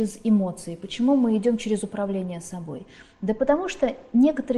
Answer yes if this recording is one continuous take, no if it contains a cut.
yes